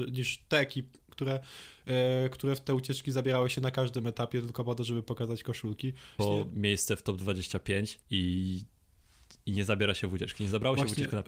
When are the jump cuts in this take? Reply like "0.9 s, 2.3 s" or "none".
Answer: 1.1 s, 6.2 s, 8.0 s